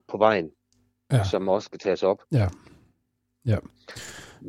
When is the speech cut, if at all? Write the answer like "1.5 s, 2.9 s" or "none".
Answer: 2.2 s